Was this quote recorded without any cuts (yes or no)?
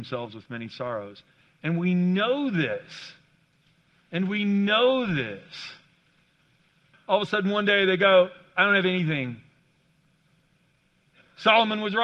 no